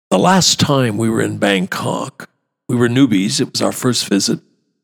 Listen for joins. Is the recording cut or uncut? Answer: uncut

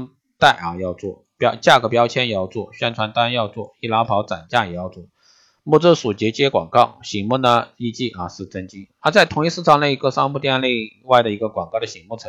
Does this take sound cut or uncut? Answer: uncut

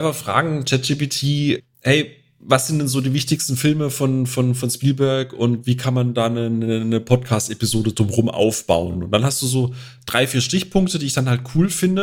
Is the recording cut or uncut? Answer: uncut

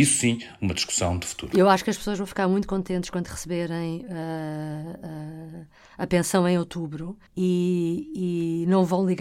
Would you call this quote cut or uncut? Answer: cut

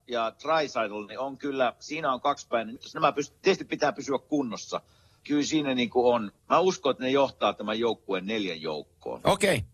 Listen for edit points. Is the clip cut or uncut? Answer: cut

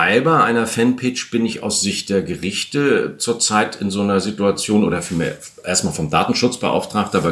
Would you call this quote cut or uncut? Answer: uncut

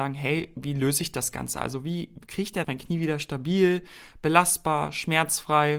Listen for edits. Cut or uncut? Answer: cut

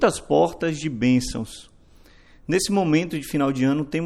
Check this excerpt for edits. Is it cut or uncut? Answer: uncut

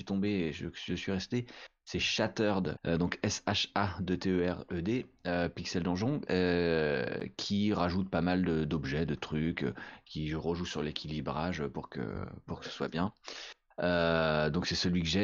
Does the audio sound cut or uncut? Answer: cut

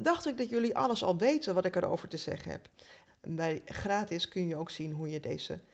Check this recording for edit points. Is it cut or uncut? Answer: cut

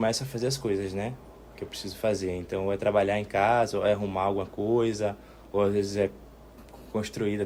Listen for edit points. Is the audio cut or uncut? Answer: uncut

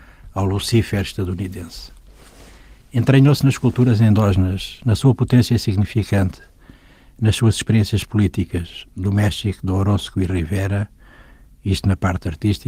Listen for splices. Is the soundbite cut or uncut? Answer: uncut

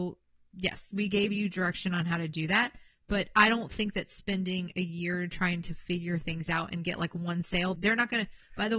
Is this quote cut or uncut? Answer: cut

